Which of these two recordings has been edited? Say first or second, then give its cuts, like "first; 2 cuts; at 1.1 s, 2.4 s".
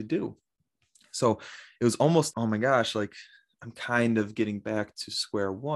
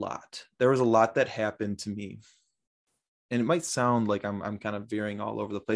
first; 1 cut; at 2.3 s